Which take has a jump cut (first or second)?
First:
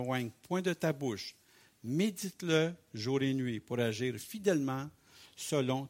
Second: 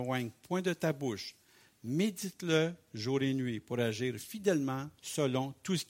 second